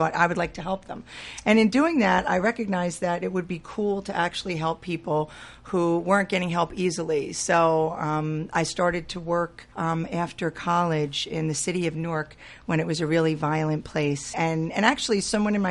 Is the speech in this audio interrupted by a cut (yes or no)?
yes